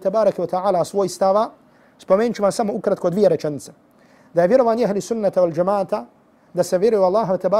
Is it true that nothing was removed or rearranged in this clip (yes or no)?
yes